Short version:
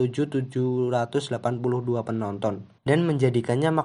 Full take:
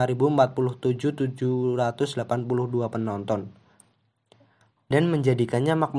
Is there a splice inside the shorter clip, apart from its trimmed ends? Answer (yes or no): yes